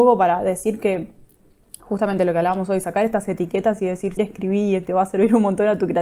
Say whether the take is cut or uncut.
cut